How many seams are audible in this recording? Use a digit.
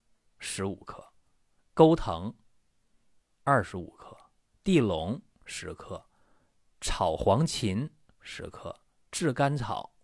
1